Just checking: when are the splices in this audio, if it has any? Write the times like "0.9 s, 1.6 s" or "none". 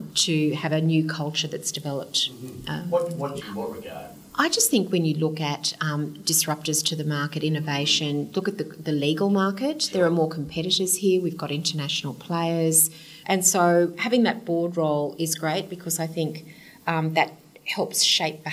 3.4 s, 13.2 s

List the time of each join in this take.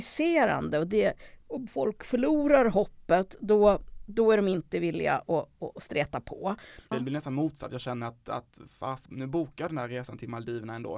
6.9 s, 9.1 s

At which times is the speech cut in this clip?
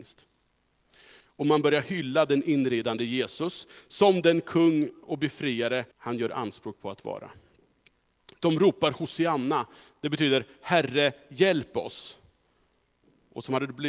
1.2 s, 5.9 s

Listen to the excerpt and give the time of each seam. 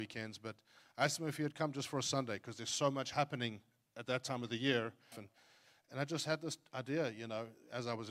5.1 s

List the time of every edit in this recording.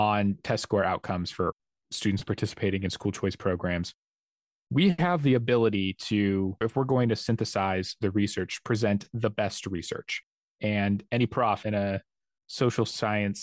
none

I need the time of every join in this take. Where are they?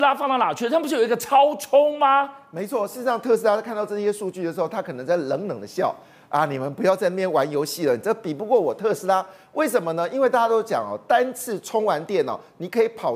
none

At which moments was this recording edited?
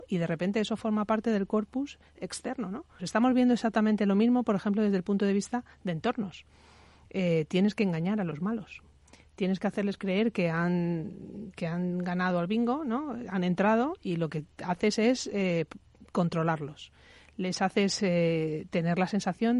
3.0 s

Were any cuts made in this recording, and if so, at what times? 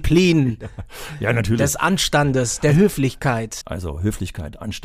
3.6 s

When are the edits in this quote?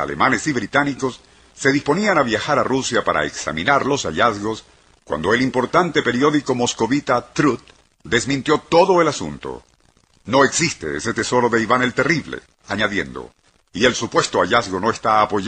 12.6 s

